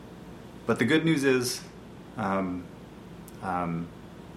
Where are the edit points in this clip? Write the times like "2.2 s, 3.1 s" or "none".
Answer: 3.4 s